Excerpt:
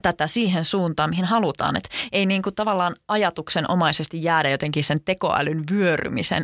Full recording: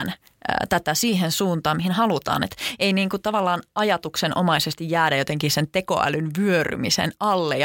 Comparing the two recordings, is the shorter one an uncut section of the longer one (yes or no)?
yes